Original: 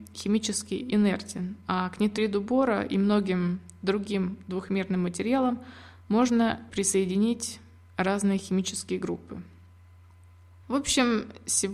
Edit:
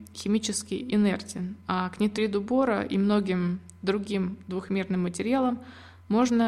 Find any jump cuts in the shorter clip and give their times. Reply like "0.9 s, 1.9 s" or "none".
none